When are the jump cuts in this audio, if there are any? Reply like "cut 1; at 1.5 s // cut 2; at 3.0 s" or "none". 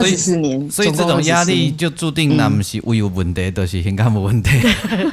none